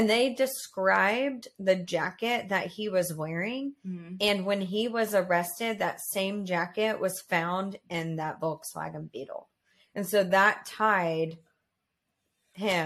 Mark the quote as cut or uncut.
uncut